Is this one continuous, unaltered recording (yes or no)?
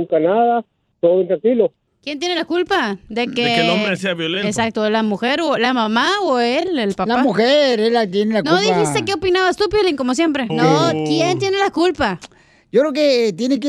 no